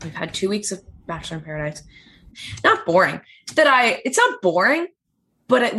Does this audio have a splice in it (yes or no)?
yes